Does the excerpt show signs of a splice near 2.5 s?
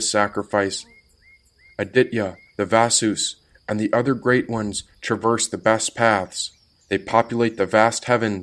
yes; 1 cut; at 2.5 s

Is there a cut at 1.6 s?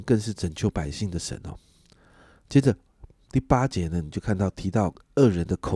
no; 0 cuts

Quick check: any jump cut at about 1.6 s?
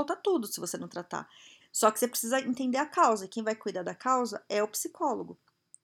yes; 1 cut; at 1.6 s

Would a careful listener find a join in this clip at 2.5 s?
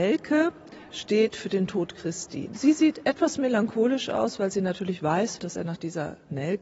yes; 2 cuts; at 2.5 s, 5.4 s

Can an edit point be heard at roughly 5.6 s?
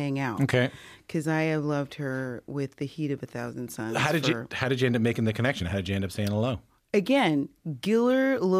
no; 0 cuts

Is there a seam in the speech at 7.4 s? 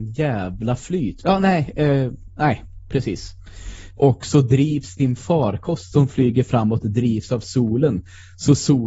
no; 2 cuts; at 1.2 s, 4.0 s

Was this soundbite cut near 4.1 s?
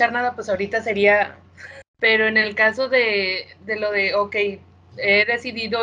no; 1 cut; at 1.8 s

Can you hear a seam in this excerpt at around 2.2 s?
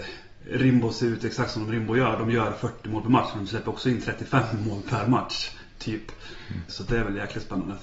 no; 1 cut; at 6.7 s

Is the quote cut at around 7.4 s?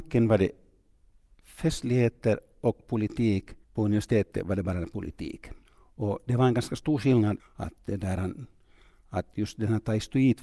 yes; 3 cuts; at 3.6 s, 5.6 s, 7.4 s

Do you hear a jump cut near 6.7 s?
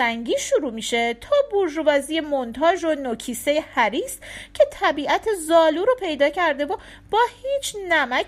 no; 0 cuts

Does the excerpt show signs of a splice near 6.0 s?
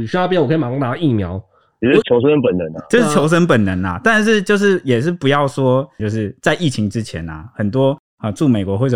yes; 2 cuts; at 2.0 s, 6.0 s

